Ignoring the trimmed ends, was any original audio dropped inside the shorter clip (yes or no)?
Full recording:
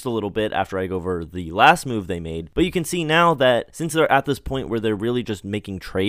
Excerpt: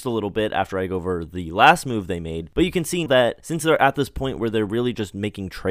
yes